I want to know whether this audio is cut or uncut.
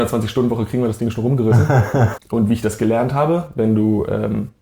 cut